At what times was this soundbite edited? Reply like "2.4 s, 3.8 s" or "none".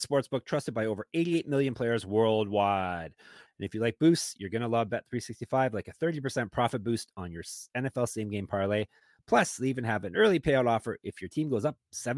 3.5 s